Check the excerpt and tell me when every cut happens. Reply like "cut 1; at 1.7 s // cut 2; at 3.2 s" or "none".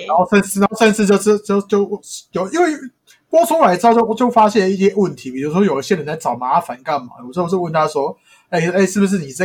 none